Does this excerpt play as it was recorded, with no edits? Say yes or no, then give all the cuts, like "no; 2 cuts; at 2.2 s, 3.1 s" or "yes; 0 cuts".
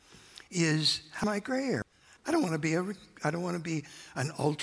no; 1 cut; at 2.2 s